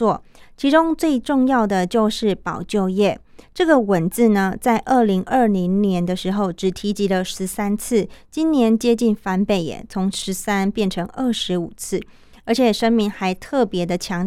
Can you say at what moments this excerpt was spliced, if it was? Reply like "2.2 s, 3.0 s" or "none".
3.4 s